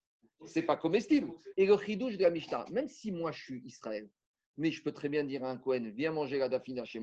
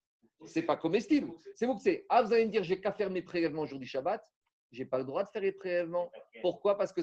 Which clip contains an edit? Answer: first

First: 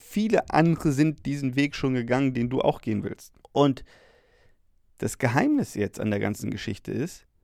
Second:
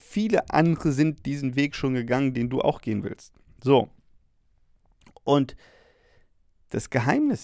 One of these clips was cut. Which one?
first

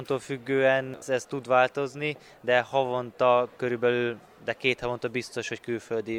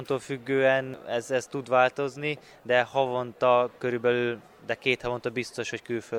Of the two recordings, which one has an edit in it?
first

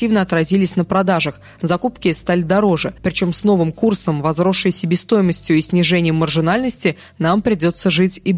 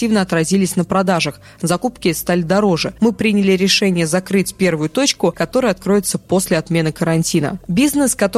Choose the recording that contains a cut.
second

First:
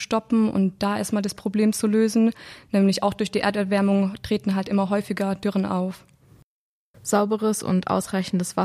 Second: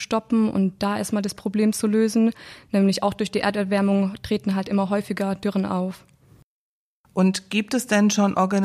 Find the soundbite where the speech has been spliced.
first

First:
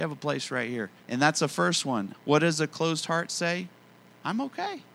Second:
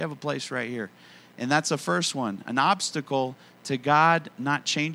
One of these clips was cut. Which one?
first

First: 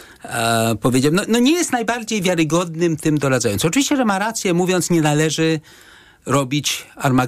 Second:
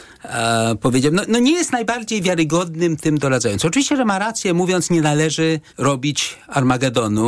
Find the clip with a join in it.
second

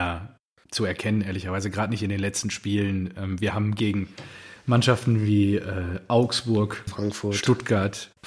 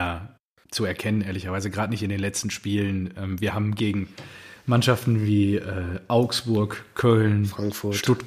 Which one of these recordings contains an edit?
first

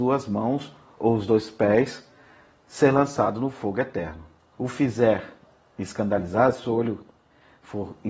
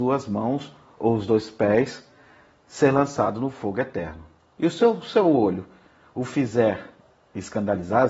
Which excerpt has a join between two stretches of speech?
first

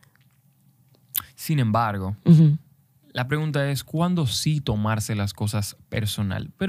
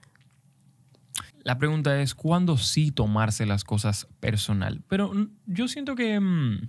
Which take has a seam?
second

